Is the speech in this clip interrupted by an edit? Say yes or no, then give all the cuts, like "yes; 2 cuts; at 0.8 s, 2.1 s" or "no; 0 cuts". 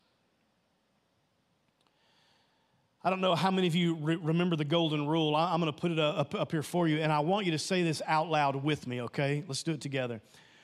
no; 0 cuts